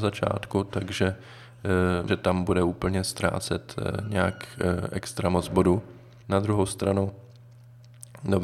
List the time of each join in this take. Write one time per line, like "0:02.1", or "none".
0:02.1
0:06.2